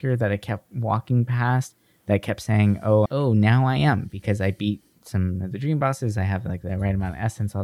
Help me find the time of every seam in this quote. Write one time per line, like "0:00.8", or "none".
0:03.0